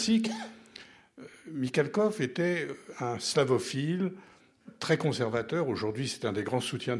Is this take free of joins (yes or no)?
yes